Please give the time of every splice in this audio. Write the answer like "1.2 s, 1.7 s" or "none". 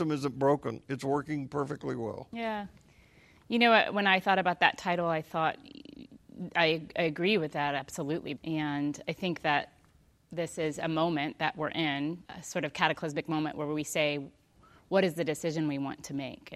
8.4 s, 12.2 s